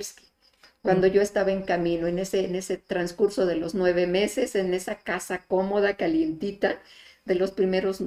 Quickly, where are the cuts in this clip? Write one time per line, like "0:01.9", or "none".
none

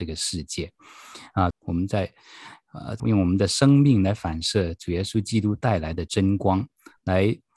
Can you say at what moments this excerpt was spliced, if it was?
0:01.5
0:03.0

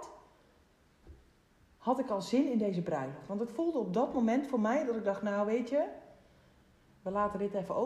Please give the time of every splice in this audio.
0:03.3

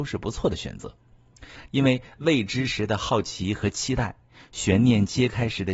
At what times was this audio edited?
0:01.7

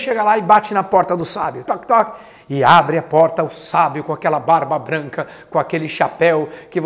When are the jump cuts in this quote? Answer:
0:01.6

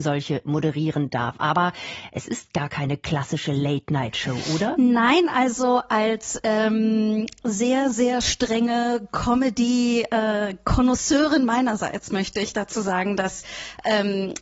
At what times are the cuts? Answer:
none

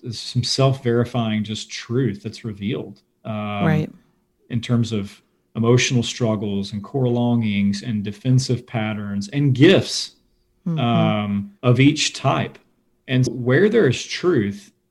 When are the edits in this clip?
0:11.6
0:13.3

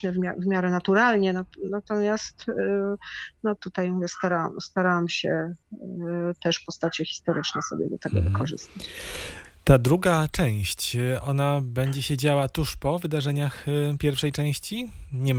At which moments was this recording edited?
0:03.6

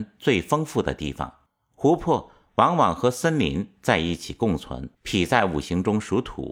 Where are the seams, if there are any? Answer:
0:04.9

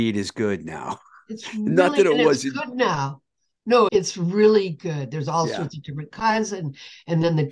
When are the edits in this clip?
0:03.9

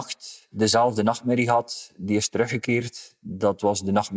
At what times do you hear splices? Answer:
none

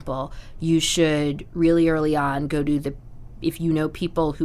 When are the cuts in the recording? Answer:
none

